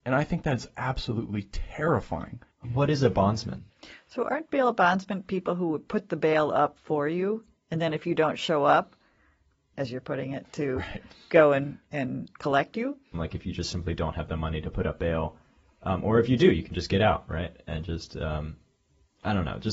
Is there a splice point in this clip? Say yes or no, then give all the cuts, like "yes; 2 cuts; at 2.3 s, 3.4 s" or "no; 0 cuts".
yes; 2 cuts; at 9.7 s, 13.1 s